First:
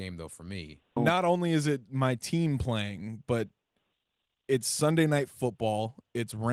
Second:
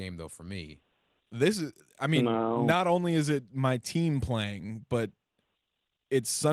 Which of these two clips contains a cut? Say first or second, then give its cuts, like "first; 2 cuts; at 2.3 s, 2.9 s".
first; 1 cut; at 1.0 s